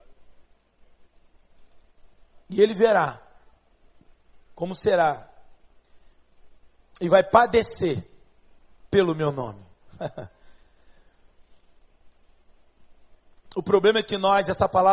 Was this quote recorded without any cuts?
yes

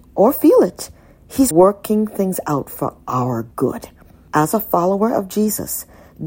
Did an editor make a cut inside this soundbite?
yes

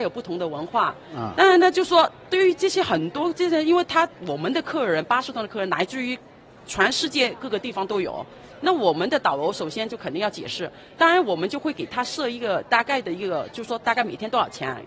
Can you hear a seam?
no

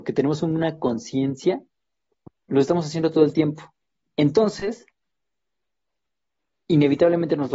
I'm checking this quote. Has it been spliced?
no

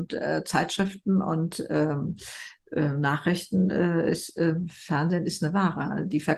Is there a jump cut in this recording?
no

